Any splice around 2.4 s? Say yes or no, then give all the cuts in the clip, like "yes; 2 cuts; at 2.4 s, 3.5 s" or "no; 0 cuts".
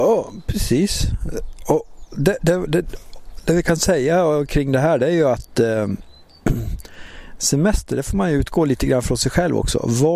yes; 1 cut; at 2.4 s